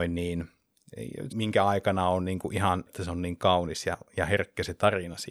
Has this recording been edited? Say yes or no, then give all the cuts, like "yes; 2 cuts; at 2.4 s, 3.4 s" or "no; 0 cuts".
yes; 2 cuts; at 1.3 s, 2.9 s